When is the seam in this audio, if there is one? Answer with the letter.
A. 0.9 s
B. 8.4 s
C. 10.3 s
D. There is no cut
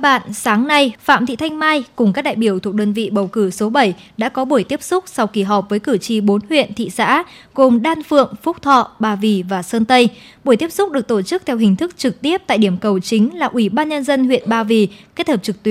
A